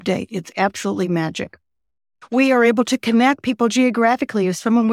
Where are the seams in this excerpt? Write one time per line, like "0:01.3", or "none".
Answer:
none